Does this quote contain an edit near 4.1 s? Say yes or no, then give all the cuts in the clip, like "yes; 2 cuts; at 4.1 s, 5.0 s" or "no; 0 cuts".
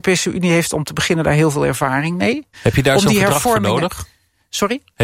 no; 1 cut; at 2.5 s